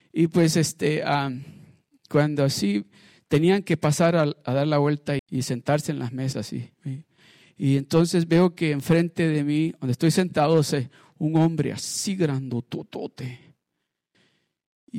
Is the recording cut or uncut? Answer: cut